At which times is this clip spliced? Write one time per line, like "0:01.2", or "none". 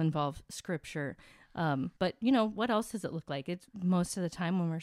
0:02.0